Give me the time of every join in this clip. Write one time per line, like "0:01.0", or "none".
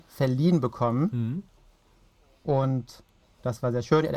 none